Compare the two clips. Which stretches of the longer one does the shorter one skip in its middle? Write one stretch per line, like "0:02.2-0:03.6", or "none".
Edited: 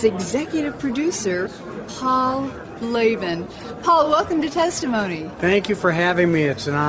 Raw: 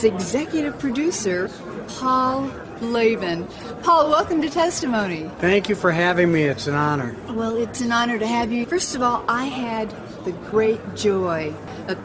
none